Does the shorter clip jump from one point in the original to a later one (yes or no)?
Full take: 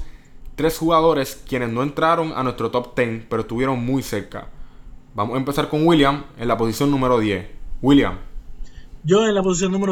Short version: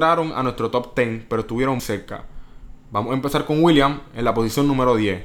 yes